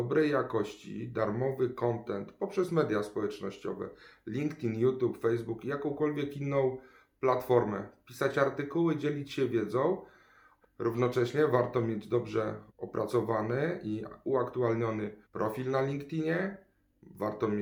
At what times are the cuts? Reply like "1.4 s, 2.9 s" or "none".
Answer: 10.6 s, 12.7 s, 15.2 s